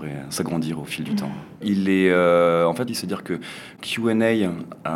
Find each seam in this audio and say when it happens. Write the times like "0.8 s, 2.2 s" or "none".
1.6 s, 2.9 s